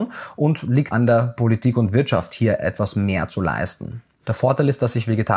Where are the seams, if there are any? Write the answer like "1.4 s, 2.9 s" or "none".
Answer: 0.9 s, 4.2 s